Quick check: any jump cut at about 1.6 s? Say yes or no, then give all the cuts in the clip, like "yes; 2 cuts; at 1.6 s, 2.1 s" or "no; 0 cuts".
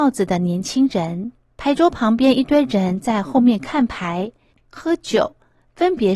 yes; 2 cuts; at 1.6 s, 4.5 s